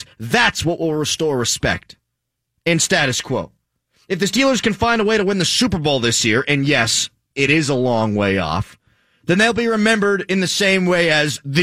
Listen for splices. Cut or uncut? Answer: uncut